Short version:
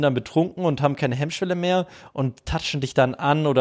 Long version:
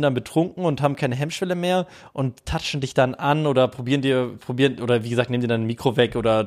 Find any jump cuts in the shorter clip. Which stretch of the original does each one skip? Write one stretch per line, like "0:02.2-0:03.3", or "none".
none